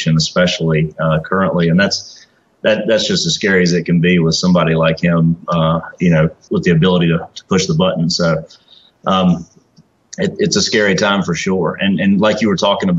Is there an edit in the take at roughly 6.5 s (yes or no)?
yes